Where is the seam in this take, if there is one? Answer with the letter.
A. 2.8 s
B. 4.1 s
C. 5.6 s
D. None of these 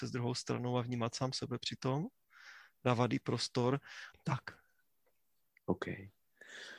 B